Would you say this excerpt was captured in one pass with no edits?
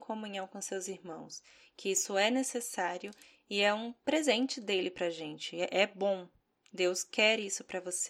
yes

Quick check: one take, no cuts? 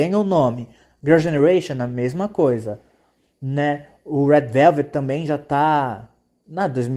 yes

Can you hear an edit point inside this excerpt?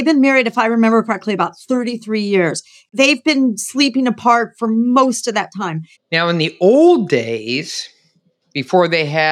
yes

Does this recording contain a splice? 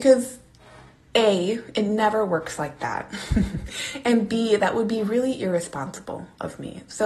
no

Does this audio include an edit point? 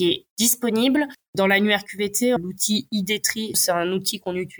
yes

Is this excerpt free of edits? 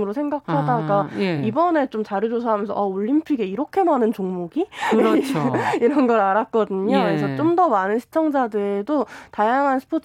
yes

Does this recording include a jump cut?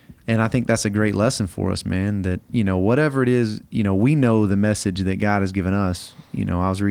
no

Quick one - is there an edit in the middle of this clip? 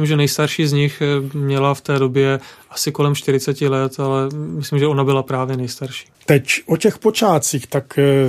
yes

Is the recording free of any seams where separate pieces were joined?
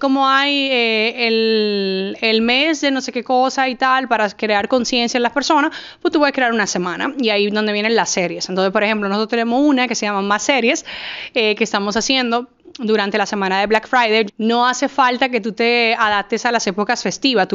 no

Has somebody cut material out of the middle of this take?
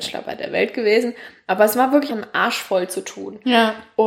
yes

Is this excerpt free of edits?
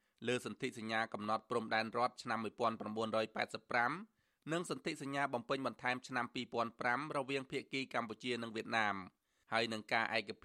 yes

